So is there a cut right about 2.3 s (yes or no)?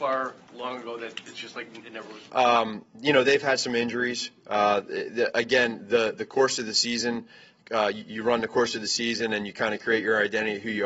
yes